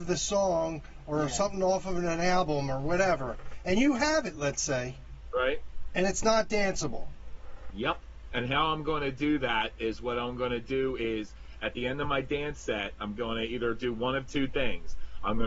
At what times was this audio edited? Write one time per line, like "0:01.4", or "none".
0:07.7

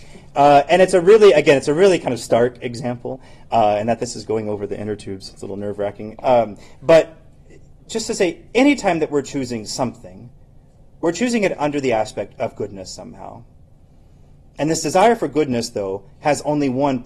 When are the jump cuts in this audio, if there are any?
none

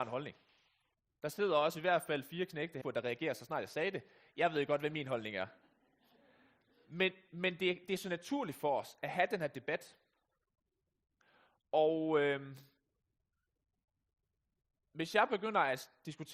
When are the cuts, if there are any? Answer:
0:02.8
0:07.3

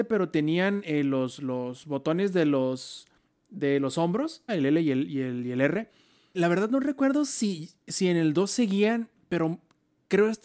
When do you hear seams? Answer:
0:04.5
0:06.3

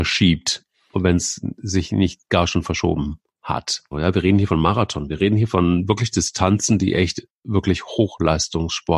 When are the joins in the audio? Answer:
0:03.9

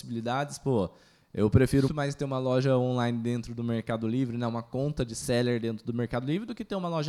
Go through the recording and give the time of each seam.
0:01.9

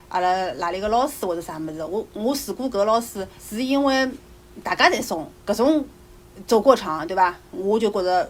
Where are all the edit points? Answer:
0:03.4
0:05.3

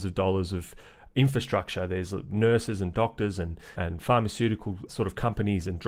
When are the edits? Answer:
0:03.7
0:04.9

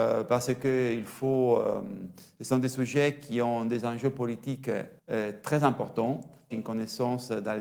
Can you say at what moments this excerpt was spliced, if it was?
0:05.0
0:06.5

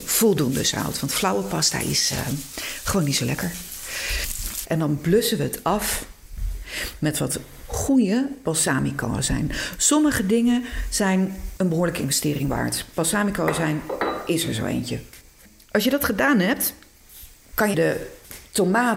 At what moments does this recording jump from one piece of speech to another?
0:04.6
0:17.7

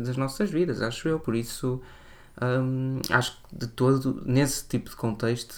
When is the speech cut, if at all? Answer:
none

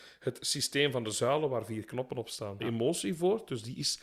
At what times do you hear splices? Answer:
0:02.6

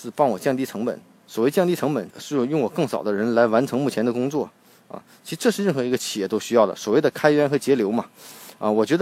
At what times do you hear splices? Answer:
0:02.1

